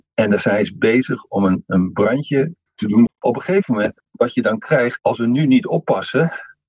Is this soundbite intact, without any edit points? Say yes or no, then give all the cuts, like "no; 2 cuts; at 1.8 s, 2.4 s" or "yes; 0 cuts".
no; 2 cuts; at 3.1 s, 5.0 s